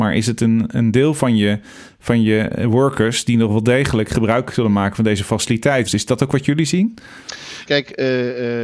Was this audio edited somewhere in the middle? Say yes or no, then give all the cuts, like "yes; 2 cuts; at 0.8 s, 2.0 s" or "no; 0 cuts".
yes; 2 cuts; at 5.9 s, 7.6 s